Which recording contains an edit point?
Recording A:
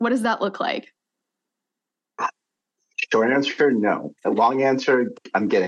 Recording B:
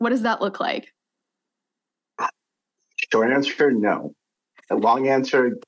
A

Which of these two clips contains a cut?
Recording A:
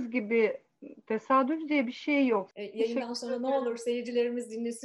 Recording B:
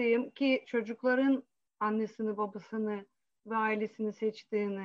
A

